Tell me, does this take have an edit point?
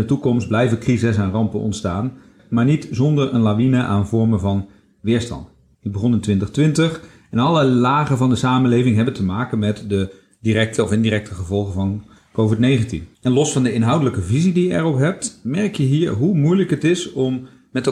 yes; 3 cuts; at 2.4 s, 5.7 s, 13.1 s

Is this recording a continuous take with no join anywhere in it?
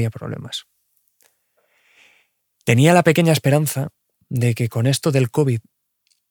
yes; 0 cuts

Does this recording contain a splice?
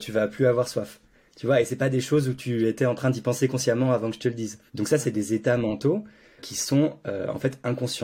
yes; 2 cuts; at 4.7 s, 6.4 s

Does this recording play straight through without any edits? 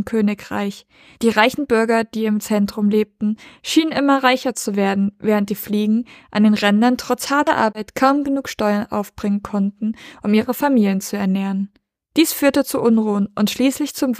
yes; 0 cuts

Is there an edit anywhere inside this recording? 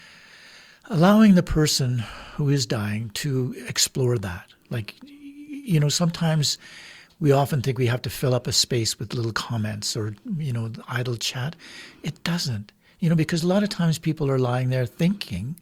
no; 0 cuts

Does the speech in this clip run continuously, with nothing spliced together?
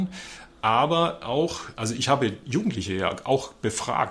no; 1 cut; at 1.7 s

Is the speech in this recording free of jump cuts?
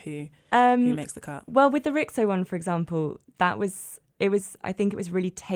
yes; 0 cuts

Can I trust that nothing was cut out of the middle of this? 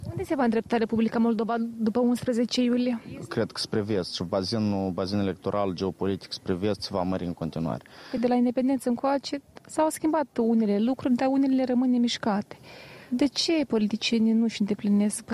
yes; 0 cuts

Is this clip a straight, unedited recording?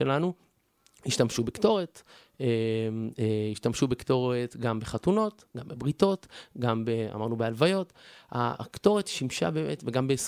yes; 0 cuts

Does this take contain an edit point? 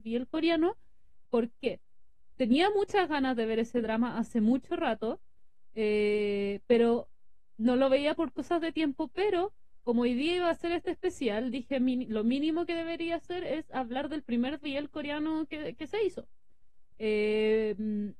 yes; 2 cuts; at 1.3 s, 16.9 s

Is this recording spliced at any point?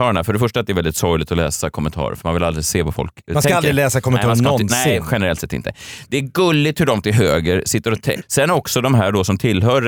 yes; 1 cut; at 8.2 s

